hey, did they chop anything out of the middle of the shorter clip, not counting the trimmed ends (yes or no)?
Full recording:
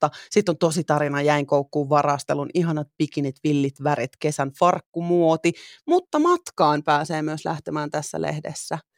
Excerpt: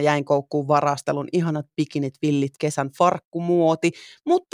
yes